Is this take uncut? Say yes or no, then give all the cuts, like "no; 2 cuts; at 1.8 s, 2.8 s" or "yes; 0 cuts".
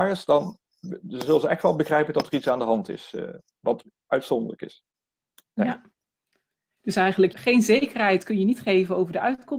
no; 1 cut; at 7.3 s